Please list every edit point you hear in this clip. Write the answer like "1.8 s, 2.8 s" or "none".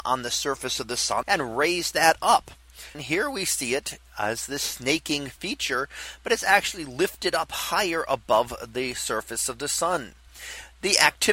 1.2 s, 2.9 s